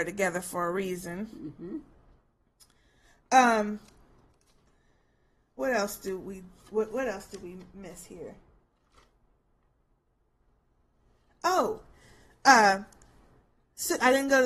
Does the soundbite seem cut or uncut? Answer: uncut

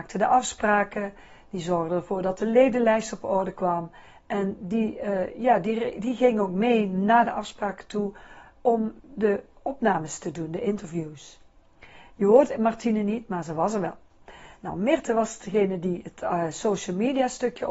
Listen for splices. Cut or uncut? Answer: uncut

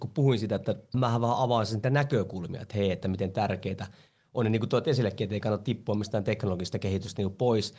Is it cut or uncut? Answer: cut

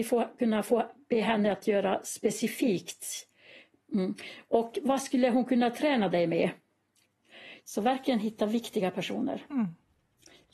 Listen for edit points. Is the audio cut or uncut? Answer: cut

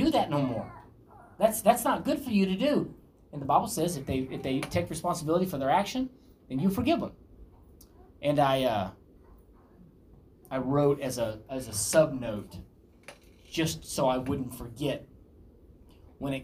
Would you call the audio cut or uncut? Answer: uncut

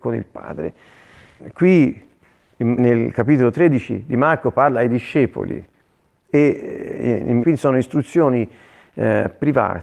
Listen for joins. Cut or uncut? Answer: cut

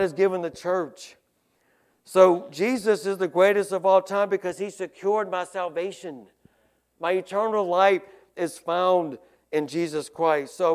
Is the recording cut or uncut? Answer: uncut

